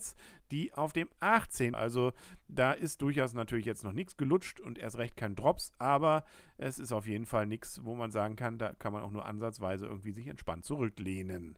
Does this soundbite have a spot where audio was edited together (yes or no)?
yes